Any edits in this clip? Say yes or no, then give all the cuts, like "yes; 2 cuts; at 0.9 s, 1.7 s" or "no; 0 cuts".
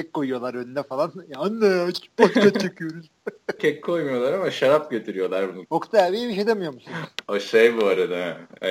yes; 2 cuts; at 3.6 s, 5.7 s